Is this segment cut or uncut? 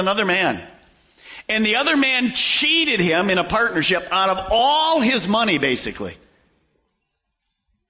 uncut